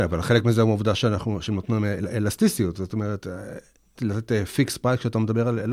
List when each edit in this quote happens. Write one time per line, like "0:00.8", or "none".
0:04.0